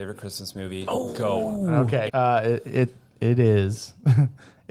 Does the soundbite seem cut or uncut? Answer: cut